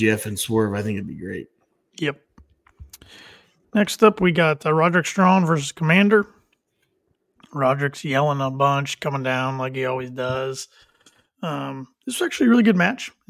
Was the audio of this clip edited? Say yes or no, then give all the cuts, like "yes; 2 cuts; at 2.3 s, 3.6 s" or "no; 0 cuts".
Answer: no; 0 cuts